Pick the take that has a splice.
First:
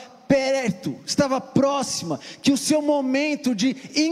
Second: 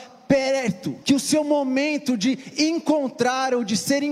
second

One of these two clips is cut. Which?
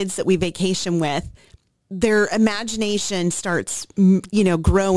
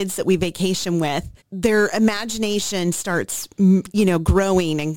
second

